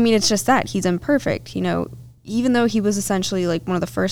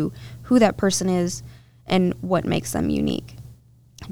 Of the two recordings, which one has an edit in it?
first; 1 cut; at 2.2 s

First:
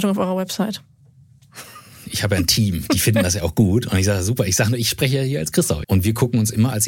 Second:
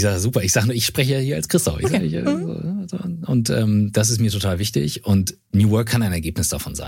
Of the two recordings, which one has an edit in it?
first; 1 cut; at 5.8 s

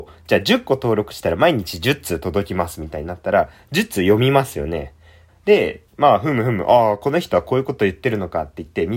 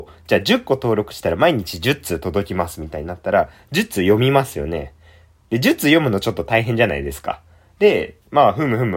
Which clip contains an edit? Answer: first; 1 cut; at 5.3 s

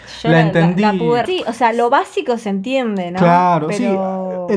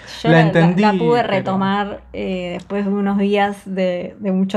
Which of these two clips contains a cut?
first; 1 cut; at 1.3 s

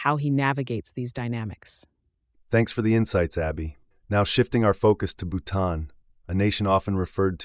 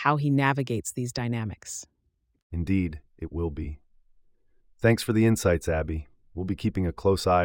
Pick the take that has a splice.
first; 2 cuts; at 2.4 s, 3.9 s

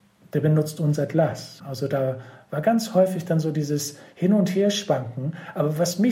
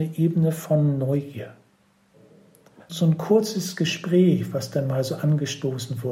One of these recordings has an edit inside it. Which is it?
second; 1 cut; at 2.8 s

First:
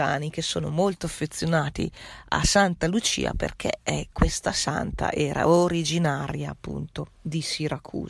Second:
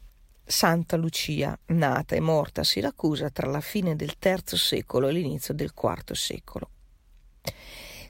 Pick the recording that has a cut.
second; 1 cut; at 1.6 s

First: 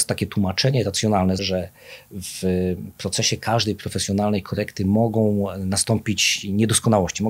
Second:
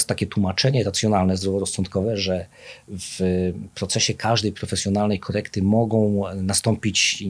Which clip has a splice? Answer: first; 1 cut; at 1.4 s

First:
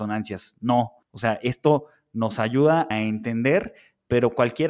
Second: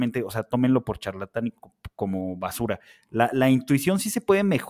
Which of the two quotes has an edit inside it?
first; 2 cuts; at 1.0 s, 2.9 s

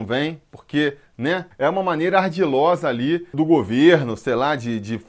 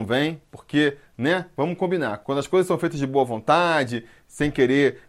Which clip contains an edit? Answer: first; 2 cuts; at 1.5 s, 3.3 s

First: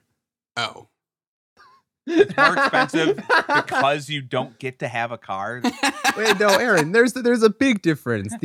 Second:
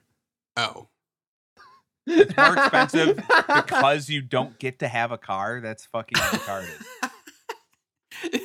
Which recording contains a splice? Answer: first; 1 cut; at 5.6 s

